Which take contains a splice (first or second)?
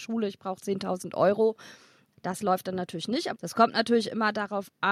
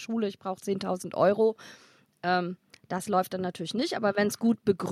first